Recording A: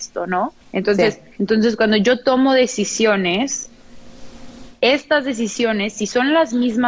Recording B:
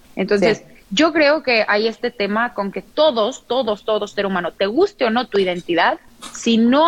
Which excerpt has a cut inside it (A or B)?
A